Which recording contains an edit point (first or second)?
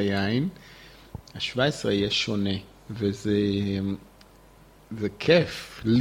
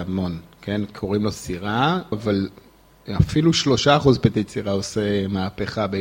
second